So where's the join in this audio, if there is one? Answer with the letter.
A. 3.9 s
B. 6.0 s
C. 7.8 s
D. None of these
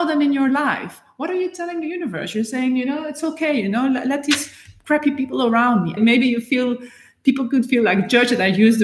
B